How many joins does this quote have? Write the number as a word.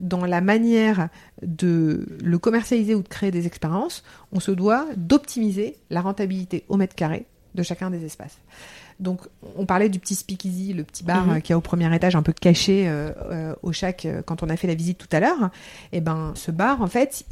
one